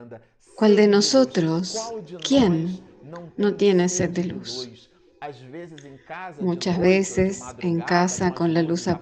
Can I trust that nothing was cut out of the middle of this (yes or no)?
yes